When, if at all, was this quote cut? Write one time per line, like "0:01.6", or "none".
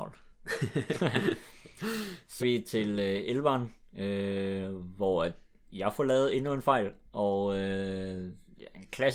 0:02.4